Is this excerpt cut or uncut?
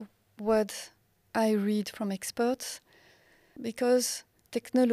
cut